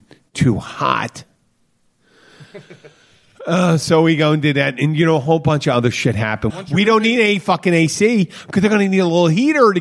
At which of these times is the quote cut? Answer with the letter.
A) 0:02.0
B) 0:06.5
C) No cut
B